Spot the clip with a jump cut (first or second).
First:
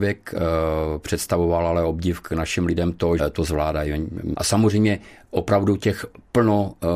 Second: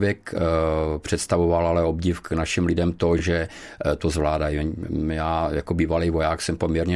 first